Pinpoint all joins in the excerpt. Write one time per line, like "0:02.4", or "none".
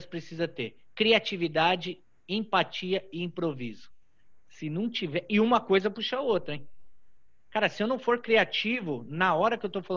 none